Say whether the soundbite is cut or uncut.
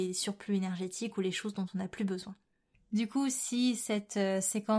uncut